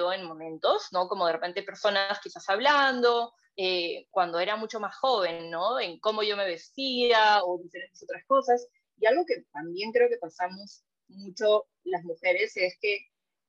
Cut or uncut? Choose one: uncut